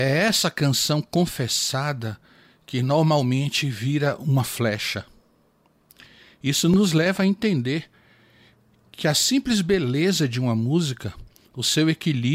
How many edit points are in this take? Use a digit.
0